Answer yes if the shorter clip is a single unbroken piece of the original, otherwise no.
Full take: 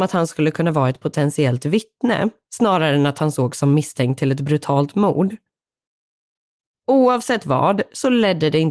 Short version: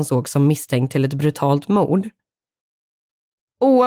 yes